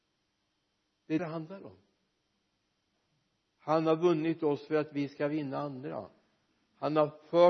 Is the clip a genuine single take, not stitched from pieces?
no; 1 cut; at 1.2 s

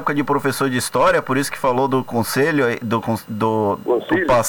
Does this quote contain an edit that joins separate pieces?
no; 0 cuts

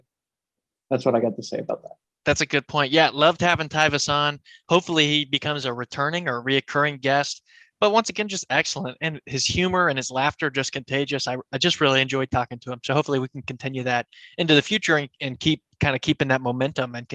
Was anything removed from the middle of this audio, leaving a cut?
no; 0 cuts

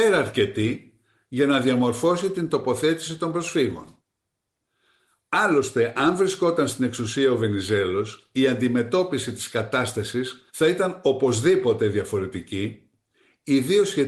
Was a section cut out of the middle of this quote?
yes; 1 cut; at 10.5 s

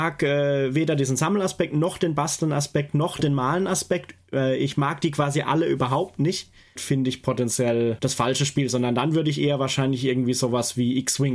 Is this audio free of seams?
no; 1 cut; at 6.8 s

